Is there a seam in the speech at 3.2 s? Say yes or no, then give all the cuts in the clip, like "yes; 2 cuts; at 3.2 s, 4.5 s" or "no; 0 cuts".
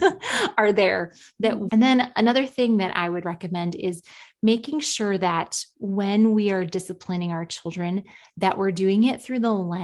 yes; 2 cuts; at 1.7 s, 3.2 s